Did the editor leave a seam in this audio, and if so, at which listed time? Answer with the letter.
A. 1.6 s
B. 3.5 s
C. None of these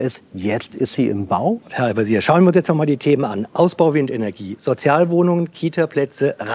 A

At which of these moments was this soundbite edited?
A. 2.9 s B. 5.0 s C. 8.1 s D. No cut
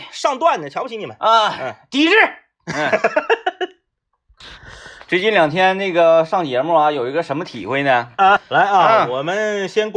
D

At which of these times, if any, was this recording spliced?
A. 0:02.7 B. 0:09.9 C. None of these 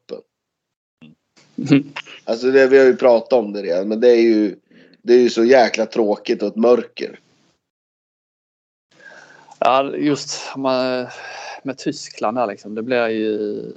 C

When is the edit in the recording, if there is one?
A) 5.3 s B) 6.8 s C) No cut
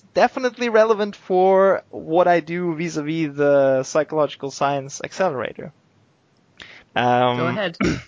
B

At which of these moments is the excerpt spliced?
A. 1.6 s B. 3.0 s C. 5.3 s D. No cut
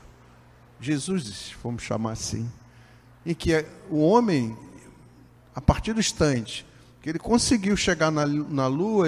D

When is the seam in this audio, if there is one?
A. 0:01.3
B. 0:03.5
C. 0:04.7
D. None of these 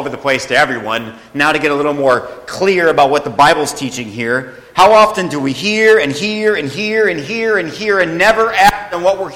D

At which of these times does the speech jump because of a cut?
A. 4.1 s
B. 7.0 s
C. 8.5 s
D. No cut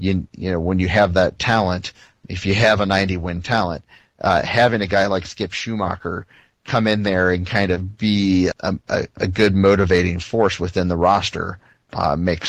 C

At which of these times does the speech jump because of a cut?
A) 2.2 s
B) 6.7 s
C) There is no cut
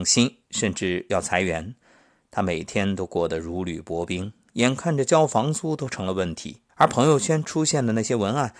B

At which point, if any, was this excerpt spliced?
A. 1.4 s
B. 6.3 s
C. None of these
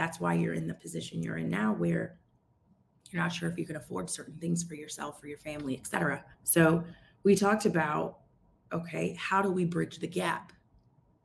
B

